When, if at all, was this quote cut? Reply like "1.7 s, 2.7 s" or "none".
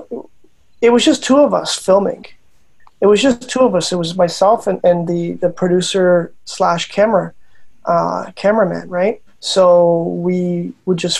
9.3 s